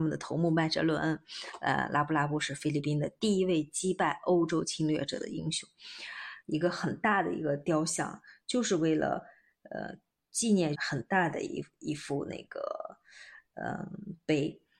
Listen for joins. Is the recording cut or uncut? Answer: cut